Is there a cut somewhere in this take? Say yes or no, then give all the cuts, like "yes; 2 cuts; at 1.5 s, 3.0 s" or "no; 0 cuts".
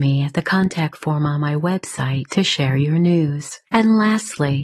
yes; 1 cut; at 3.7 s